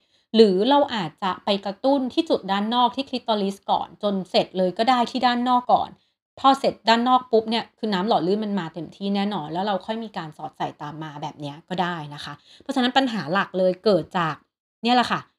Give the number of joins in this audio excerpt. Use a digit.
1